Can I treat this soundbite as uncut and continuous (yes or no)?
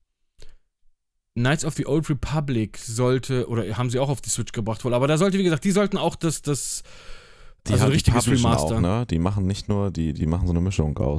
no